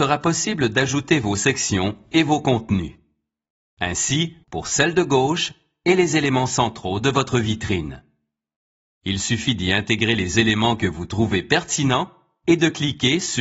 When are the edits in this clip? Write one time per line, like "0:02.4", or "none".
0:04.4
0:08.9